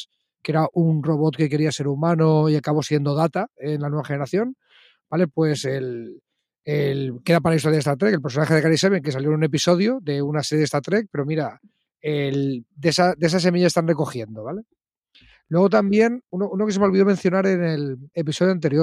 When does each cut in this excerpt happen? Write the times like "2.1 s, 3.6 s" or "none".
none